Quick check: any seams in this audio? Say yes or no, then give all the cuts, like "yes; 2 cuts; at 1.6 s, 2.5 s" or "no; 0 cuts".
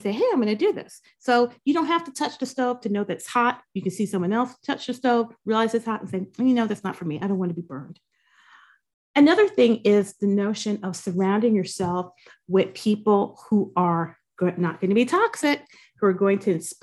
no; 0 cuts